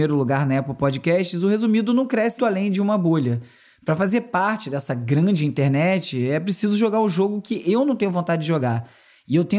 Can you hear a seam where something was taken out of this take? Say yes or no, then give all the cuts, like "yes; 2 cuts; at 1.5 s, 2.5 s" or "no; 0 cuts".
yes; 1 cut; at 2.4 s